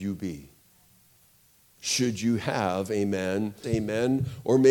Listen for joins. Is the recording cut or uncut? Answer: cut